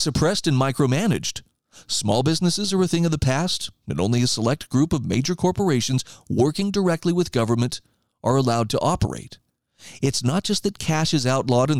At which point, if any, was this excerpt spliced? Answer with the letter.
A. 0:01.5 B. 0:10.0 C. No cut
C